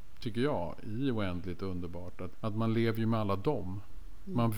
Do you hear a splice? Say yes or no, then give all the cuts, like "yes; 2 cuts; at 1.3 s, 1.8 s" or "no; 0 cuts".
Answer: yes; 1 cut; at 2.3 s